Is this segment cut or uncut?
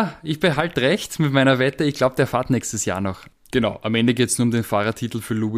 cut